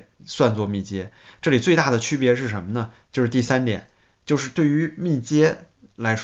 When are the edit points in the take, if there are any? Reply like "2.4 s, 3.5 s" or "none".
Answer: none